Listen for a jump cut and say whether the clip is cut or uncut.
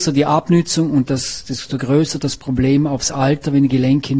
uncut